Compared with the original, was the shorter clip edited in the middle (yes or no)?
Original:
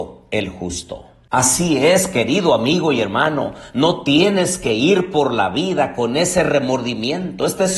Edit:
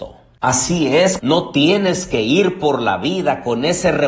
yes